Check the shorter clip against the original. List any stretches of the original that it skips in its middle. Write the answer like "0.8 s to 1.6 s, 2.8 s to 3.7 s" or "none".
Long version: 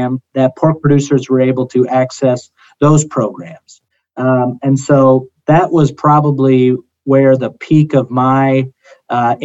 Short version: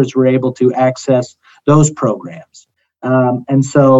none